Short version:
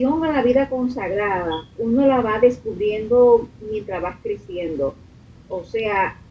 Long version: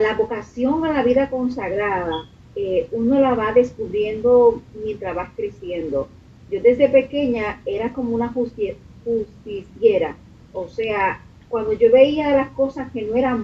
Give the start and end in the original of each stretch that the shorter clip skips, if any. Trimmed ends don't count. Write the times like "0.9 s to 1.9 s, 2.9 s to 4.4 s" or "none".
2.4 s to 2.9 s, 6.4 s to 10.4 s